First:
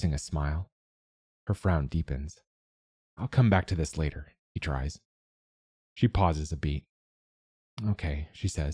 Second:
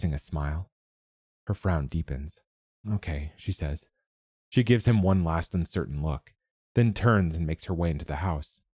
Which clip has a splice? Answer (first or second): second